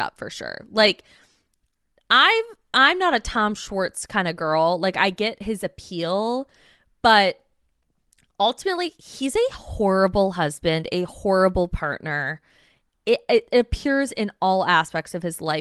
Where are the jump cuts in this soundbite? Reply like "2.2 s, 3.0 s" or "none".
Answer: none